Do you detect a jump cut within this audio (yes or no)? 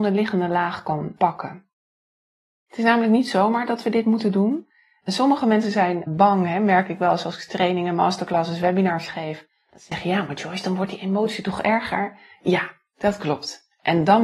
no